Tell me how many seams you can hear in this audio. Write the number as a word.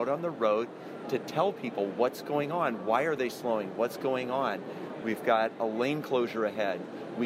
zero